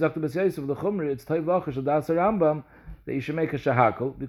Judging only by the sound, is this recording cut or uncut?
uncut